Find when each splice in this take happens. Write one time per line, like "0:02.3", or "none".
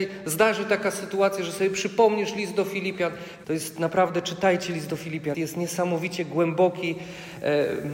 0:03.4
0:05.3